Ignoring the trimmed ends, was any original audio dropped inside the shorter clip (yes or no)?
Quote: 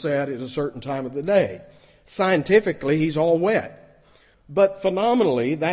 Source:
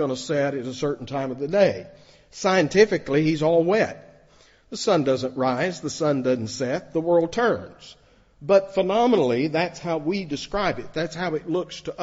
yes